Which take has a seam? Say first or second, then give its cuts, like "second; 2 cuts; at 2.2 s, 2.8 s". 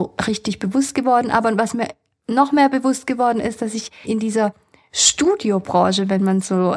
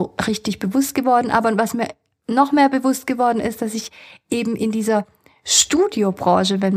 first; 1 cut; at 4.0 s